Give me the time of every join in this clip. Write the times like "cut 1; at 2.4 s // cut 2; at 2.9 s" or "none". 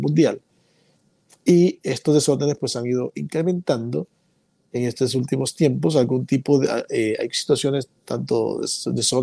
none